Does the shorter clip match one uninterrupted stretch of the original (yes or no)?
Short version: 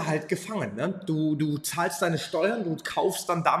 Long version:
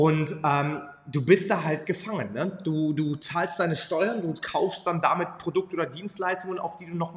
yes